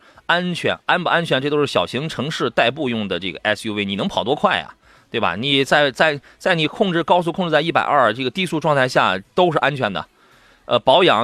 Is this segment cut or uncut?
uncut